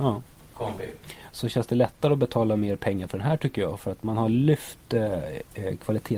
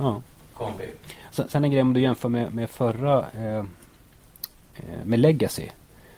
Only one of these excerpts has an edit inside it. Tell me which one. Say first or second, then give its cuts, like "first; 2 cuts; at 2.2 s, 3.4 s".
first; 1 cut; at 1.3 s